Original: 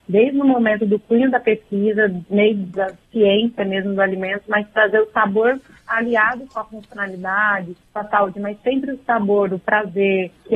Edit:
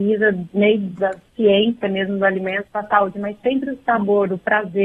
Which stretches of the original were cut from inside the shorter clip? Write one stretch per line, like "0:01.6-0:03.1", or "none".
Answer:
0:04.4-0:07.9